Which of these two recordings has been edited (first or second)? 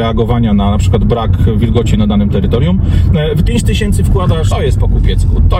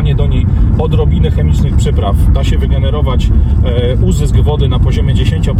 first